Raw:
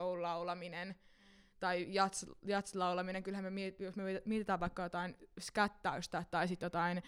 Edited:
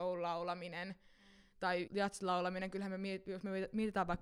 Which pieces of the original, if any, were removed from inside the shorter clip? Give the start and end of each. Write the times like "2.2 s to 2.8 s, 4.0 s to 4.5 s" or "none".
1.9 s to 2.4 s